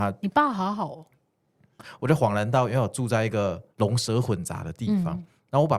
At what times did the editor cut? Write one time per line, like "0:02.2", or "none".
0:01.8
0:03.7